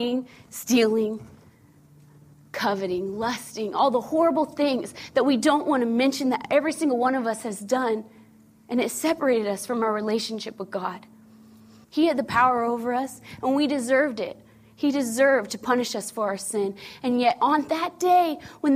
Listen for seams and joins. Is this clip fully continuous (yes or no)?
no